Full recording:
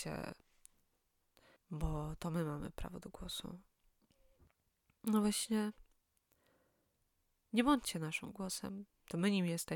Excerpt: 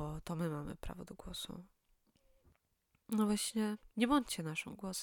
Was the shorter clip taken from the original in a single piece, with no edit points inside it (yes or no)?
no